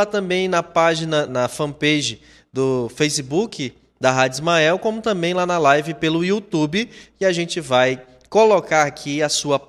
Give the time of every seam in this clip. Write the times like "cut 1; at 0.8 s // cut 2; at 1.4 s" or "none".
cut 1; at 1.3 s